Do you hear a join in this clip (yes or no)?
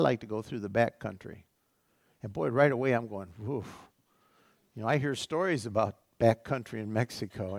no